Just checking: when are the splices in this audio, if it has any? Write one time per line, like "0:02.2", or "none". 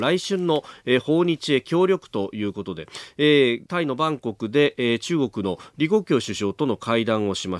0:03.7